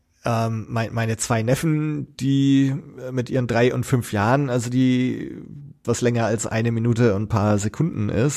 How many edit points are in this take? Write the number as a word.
one